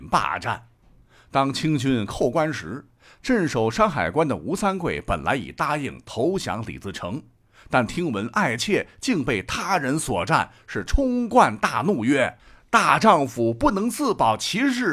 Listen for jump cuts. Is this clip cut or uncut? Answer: uncut